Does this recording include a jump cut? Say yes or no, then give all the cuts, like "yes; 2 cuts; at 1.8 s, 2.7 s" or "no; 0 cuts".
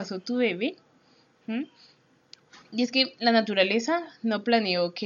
no; 0 cuts